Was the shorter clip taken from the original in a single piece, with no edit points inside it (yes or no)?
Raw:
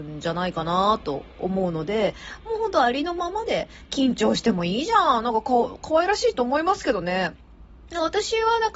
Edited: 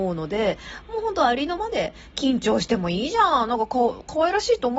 no